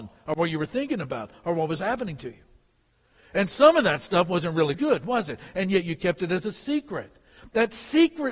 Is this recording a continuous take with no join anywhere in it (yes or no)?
no